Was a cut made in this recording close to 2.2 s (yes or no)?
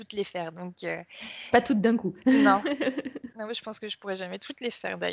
no